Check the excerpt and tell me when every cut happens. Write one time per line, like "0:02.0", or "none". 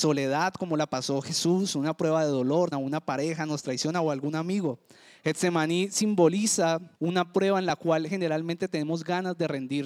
0:02.7
0:06.9